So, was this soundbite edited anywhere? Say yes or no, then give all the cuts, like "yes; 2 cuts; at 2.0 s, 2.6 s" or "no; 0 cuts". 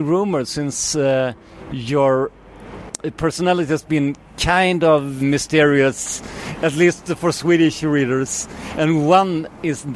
yes; 1 cut; at 5.2 s